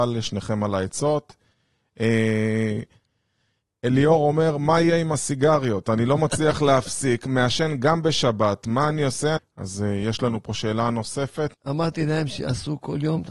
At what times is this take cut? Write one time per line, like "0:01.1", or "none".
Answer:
0:09.4
0:11.5

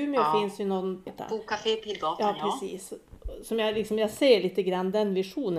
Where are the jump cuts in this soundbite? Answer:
0:01.1

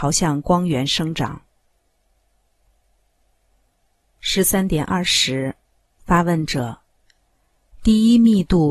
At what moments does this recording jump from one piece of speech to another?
none

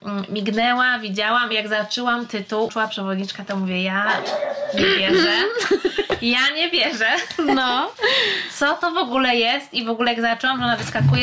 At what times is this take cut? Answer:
0:02.7

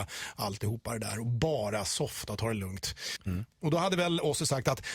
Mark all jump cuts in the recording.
0:03.2

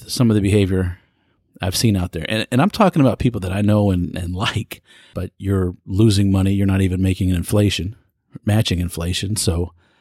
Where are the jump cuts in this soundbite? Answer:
0:05.1

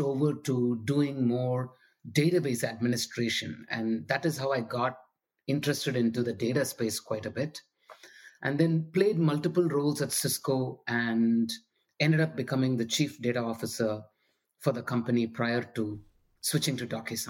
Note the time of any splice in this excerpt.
none

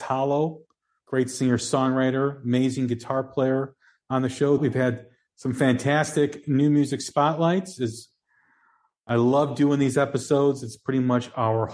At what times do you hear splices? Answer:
0:04.6

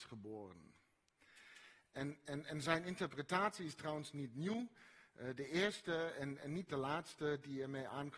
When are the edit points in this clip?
none

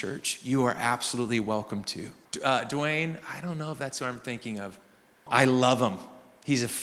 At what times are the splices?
0:02.2
0:05.3

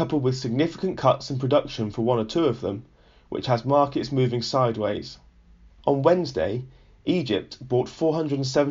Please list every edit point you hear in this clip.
0:05.7

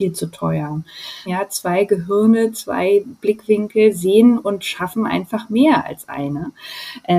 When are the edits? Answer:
0:01.3

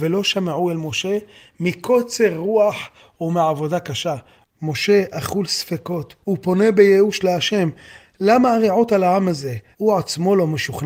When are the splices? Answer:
0:04.4
0:09.7

